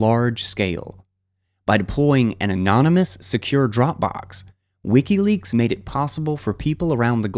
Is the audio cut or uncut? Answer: uncut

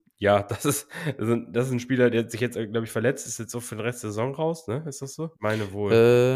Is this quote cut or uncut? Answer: cut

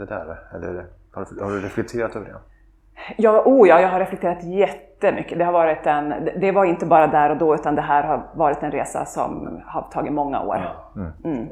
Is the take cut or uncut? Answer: uncut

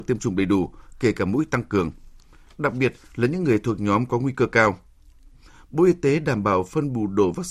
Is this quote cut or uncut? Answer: uncut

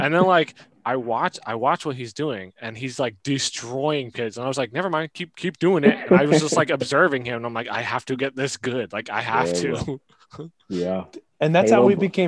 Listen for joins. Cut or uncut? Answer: uncut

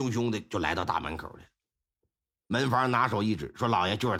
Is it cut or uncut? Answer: uncut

